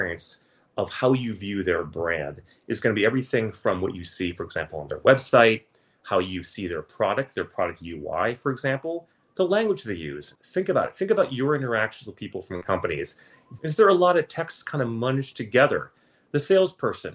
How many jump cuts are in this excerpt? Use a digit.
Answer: 2